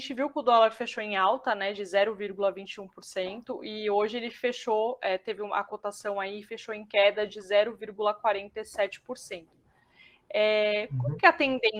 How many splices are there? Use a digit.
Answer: 0